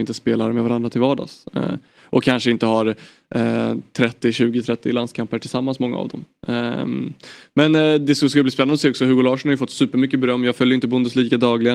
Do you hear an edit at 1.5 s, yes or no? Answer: no